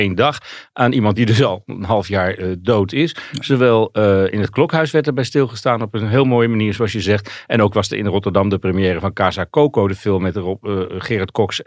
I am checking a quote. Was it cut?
no; 0 cuts

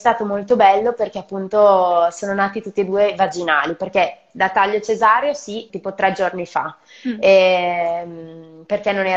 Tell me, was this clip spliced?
yes; 1 cut; at 5.7 s

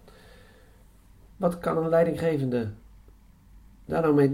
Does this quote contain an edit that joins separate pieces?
yes; 1 cut; at 1.3 s

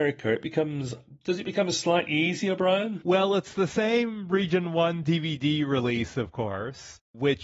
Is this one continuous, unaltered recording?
yes; 0 cuts

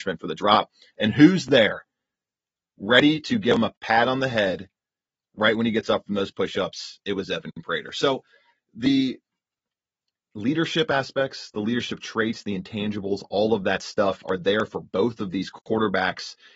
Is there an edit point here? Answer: no; 0 cuts

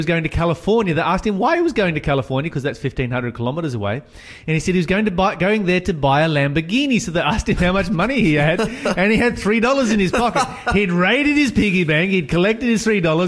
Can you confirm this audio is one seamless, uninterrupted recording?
yes; 0 cuts

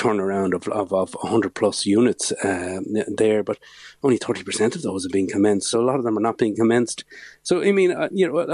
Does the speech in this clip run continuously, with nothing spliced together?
yes; 0 cuts

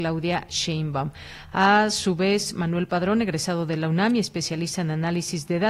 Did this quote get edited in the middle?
no; 0 cuts

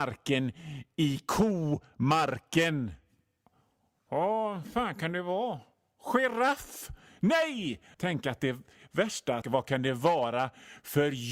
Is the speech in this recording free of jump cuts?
no; 2 cuts; at 7.9 s, 9.4 s

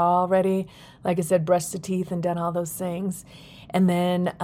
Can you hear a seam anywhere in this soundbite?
no; 0 cuts

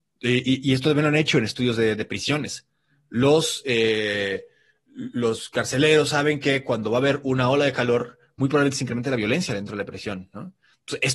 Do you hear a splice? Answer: no; 0 cuts

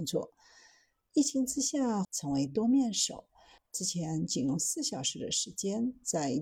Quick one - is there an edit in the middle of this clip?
yes; 2 cuts; at 2.0 s, 3.6 s

